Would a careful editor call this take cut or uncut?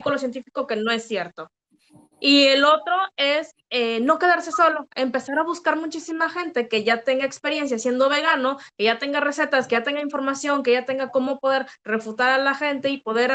uncut